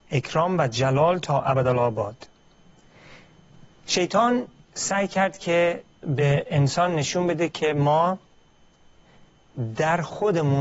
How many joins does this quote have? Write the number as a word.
zero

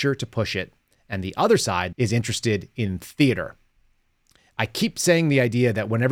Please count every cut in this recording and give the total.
one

